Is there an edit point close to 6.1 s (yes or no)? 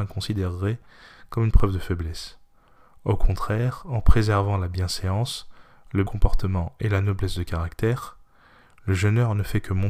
yes